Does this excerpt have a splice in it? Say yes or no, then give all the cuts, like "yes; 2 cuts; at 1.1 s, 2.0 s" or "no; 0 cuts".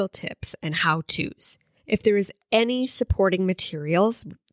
no; 0 cuts